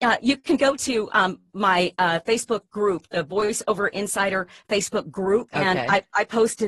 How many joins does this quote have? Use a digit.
0